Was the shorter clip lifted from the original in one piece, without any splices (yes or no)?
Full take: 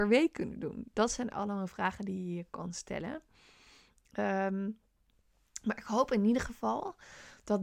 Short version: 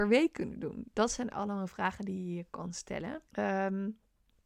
no